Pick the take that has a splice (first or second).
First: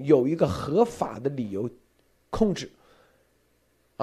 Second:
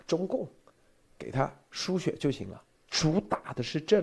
second